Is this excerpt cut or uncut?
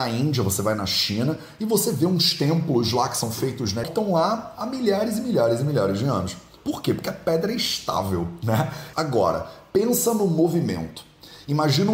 cut